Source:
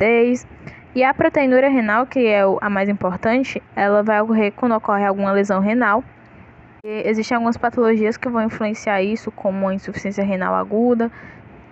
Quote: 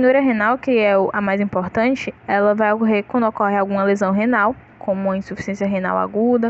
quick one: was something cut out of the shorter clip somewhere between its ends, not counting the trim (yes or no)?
yes